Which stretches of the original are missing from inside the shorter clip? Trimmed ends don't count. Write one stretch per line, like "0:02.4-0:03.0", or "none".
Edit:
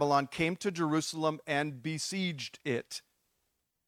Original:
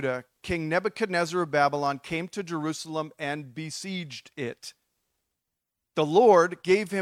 none